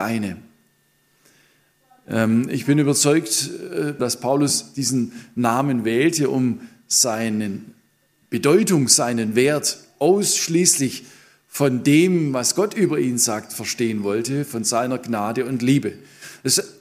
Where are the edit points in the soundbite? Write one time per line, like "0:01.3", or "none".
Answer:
0:04.0